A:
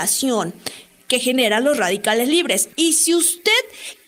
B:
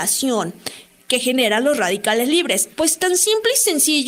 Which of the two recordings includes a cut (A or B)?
A